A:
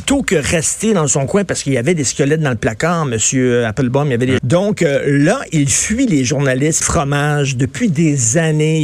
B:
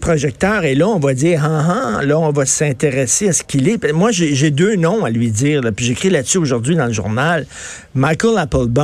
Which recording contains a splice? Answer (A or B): A